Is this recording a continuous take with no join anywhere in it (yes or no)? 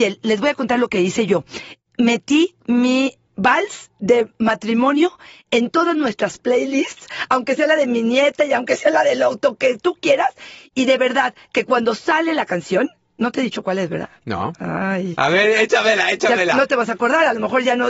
yes